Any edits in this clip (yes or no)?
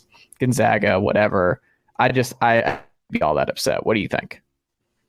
no